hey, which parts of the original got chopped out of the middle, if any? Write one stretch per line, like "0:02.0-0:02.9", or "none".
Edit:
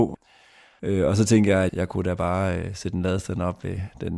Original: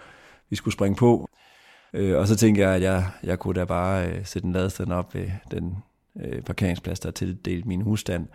0:02.8-0:03.2